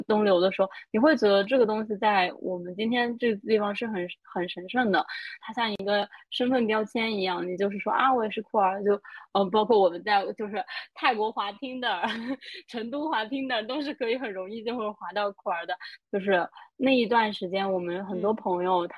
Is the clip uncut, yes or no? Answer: no